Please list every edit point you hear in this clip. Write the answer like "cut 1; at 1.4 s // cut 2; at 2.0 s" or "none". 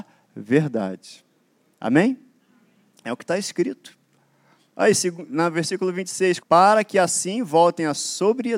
cut 1; at 6.4 s